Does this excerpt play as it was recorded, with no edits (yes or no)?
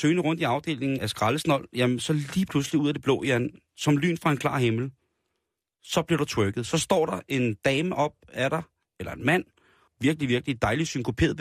no